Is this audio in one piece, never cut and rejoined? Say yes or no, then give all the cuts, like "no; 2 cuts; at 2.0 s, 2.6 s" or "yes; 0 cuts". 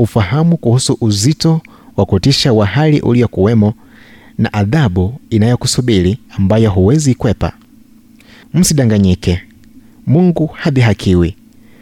no; 1 cut; at 6.3 s